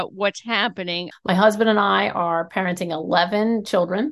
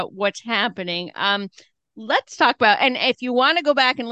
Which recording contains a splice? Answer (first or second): first